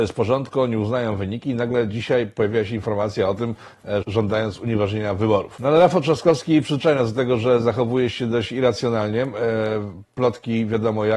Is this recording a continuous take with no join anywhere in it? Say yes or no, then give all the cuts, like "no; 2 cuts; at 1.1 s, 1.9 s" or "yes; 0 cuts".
no; 1 cut; at 4.0 s